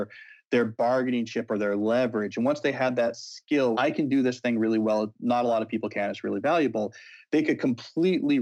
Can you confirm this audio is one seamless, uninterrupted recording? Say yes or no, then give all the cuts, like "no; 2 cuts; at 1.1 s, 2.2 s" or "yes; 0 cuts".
no; 1 cut; at 3.7 s